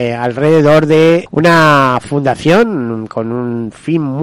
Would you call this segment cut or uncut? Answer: cut